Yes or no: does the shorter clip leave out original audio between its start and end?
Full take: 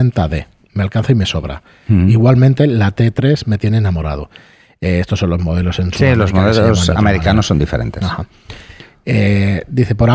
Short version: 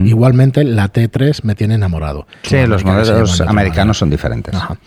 yes